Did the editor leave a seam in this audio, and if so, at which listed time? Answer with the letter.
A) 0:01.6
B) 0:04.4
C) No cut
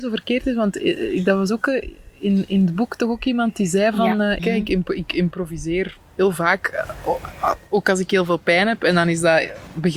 B